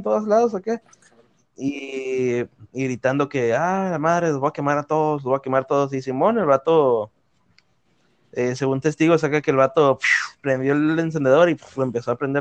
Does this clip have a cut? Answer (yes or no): no